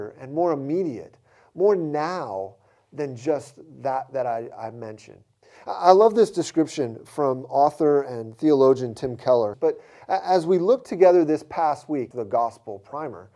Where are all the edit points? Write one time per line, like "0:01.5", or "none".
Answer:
0:09.5
0:12.1